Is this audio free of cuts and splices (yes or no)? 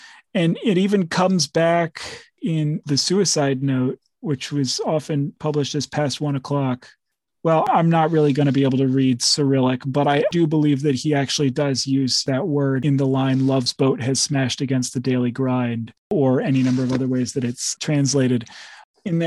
yes